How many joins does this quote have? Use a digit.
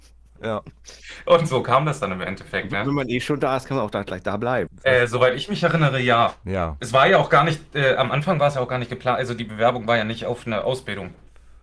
1